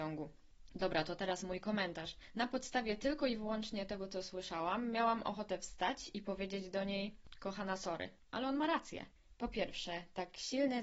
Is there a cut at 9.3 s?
yes; 1 cut; at 9.3 s

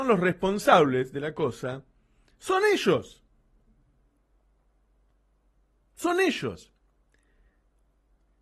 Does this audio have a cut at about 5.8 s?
no; 0 cuts

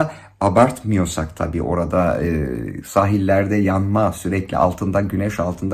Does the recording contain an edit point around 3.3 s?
no; 0 cuts

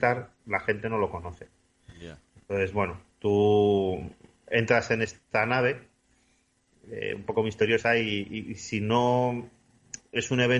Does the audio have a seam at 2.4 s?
no; 0 cuts

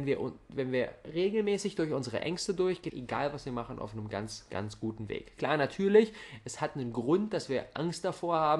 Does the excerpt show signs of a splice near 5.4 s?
no; 1 cut; at 2.9 s

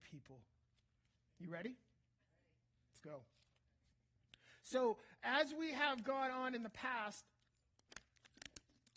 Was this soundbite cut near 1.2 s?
yes; 1 cut; at 1.2 s

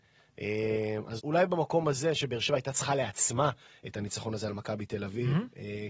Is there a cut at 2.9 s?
no; 1 cut; at 1.2 s

